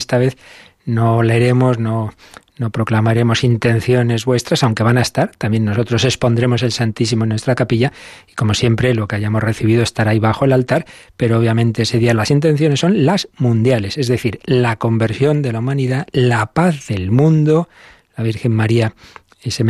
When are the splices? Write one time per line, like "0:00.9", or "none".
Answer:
none